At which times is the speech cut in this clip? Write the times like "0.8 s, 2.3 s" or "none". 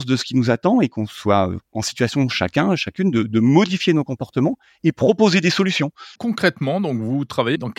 1.7 s, 6.2 s